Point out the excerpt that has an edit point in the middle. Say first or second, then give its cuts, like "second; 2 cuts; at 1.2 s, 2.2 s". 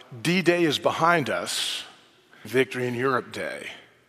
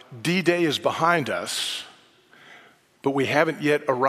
first; 1 cut; at 2.4 s